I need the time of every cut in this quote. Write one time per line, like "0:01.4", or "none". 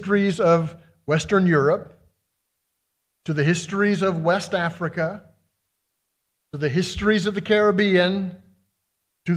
none